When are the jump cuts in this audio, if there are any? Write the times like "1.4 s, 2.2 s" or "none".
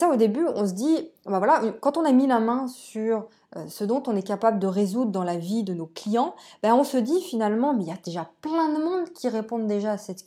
none